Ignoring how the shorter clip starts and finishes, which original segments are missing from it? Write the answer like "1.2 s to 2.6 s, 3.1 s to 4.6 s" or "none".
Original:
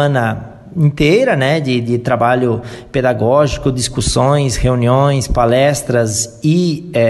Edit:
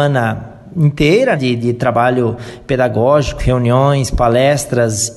1.3 s to 1.6 s, 3.6 s to 4.6 s